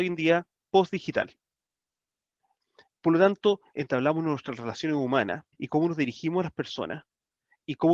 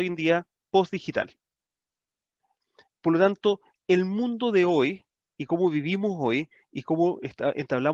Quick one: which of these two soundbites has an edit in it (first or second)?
first